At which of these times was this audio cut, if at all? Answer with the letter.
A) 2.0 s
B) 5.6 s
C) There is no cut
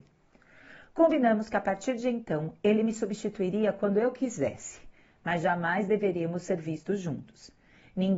C